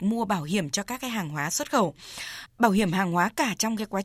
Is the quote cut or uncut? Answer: cut